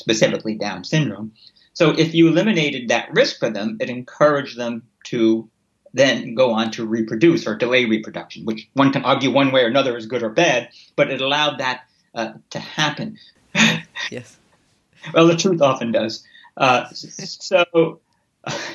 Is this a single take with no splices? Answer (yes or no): no